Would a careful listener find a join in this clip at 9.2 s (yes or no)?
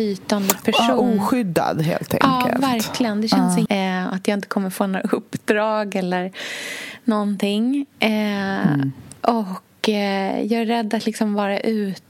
no